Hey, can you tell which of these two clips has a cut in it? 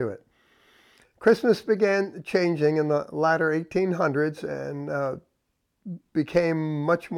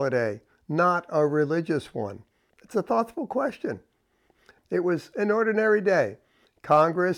second; 2 cuts; at 2.5 s, 4.6 s

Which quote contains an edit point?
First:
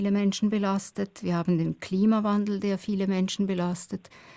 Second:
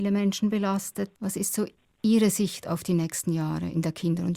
second; 1 cut; at 1.1 s

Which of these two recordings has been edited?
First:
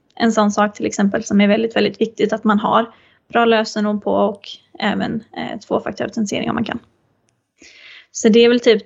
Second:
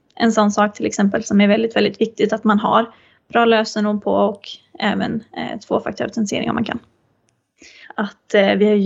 second; 1 cut; at 7.8 s

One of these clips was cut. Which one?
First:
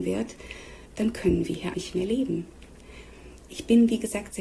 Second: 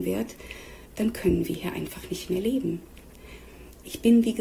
first; 1 cut; at 1.7 s

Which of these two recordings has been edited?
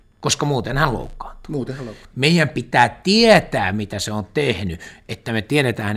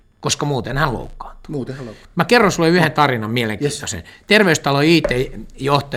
first; 1 cut; at 2.1 s

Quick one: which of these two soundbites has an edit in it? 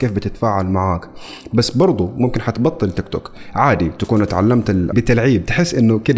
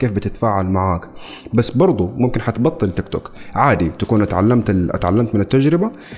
first; 1 cut; at 4.9 s

